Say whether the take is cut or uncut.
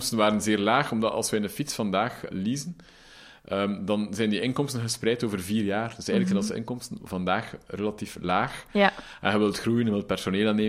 cut